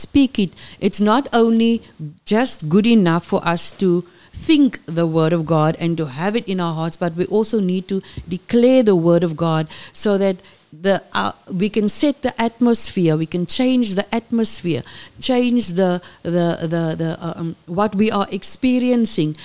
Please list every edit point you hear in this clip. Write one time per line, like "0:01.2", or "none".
0:02.2